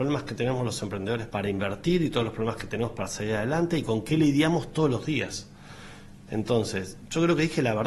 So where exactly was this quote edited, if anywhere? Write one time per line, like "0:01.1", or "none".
0:01.3
0:06.3